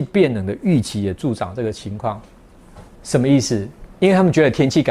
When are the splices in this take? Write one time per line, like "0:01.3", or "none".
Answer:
none